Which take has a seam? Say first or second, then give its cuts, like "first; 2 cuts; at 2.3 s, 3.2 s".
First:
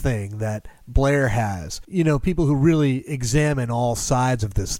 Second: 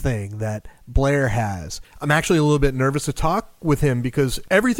second; 1 cut; at 1.8 s